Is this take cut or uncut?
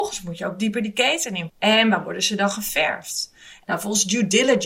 cut